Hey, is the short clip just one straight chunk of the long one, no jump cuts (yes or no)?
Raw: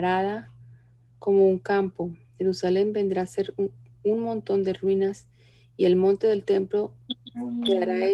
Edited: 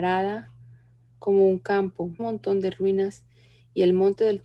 no